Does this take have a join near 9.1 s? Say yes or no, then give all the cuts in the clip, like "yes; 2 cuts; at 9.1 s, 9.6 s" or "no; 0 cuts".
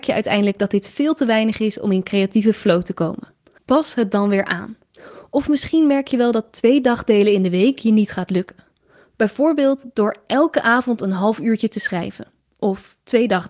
yes; 1 cut; at 9.1 s